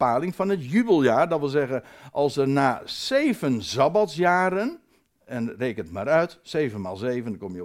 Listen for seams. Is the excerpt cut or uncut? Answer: uncut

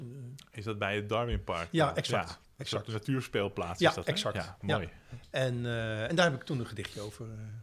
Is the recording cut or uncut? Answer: uncut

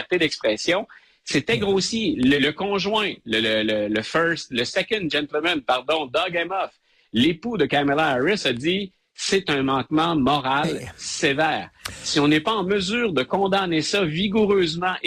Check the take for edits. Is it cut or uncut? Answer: cut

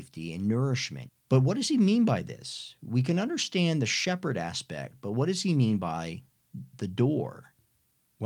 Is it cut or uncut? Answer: cut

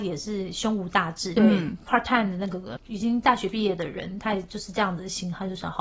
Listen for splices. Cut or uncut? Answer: cut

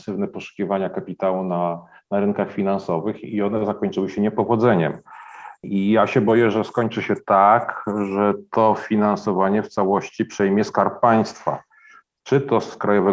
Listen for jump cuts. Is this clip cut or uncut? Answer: uncut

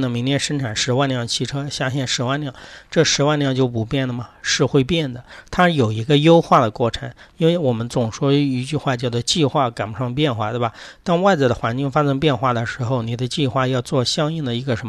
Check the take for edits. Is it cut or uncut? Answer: uncut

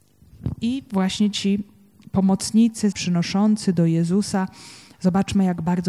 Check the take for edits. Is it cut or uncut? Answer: cut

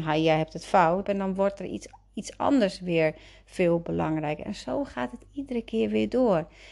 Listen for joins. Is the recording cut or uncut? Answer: cut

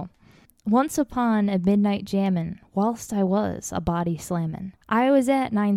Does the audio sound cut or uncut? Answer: cut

